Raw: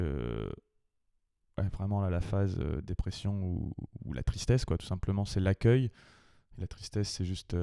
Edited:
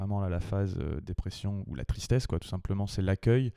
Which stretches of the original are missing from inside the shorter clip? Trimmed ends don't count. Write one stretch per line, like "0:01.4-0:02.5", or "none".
0:03.4-0:04.0